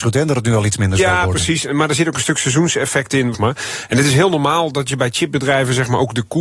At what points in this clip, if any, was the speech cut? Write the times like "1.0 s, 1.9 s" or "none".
3.3 s

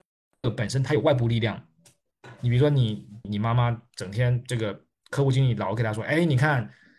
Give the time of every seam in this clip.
3.2 s

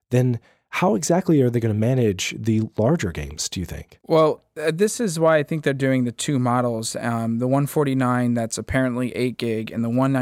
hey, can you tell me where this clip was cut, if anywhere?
4.0 s

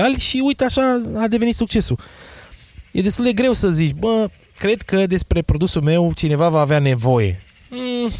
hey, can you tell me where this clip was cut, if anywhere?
none

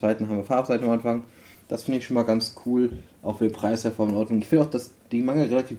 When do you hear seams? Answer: 1.5 s

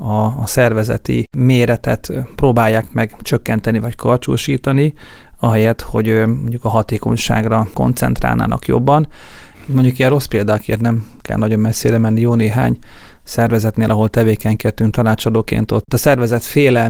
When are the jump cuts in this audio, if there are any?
9.5 s

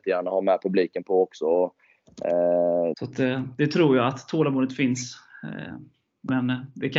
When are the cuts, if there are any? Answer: 2.9 s

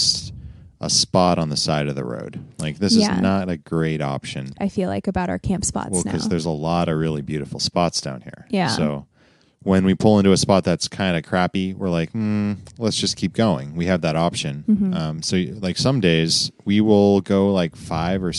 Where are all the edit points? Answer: 4.6 s

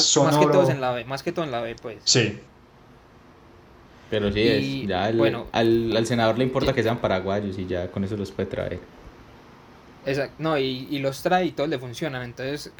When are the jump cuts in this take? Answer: none

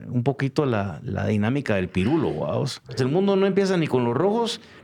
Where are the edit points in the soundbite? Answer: 3.0 s

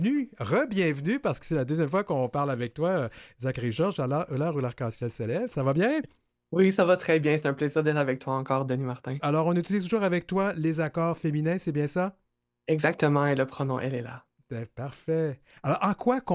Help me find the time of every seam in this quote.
9.2 s

